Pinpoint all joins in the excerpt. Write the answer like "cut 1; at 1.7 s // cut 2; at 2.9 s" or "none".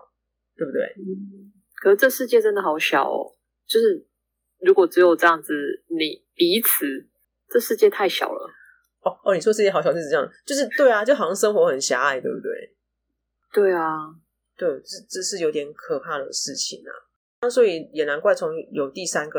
cut 1; at 13.4 s